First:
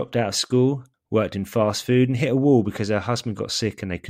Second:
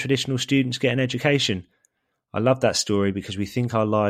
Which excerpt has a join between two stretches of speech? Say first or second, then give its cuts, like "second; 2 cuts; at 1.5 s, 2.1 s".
first; 1 cut; at 0.9 s